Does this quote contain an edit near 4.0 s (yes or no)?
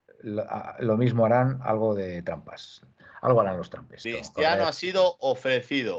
yes